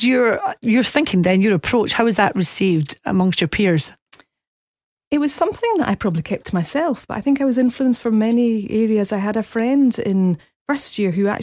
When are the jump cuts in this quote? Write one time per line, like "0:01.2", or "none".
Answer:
none